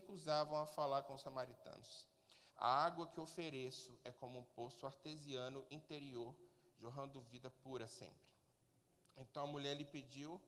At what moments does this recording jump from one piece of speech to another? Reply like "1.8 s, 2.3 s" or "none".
2.5 s